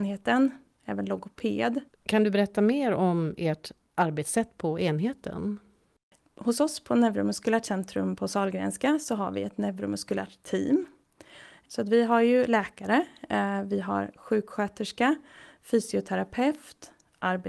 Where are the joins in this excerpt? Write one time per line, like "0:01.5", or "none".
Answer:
0:01.9

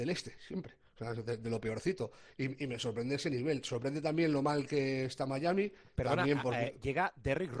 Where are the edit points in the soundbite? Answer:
none

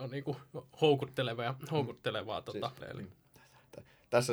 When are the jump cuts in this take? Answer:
0:02.8

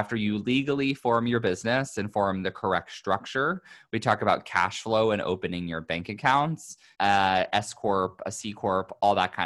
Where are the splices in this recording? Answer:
0:06.9

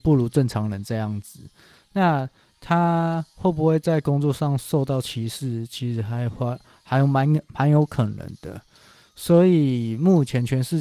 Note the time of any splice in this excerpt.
none

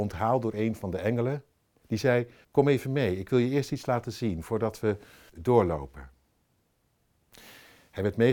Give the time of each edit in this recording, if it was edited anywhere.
0:02.4
0:05.3

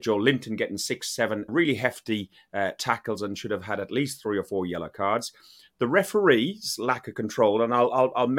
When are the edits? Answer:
0:01.5

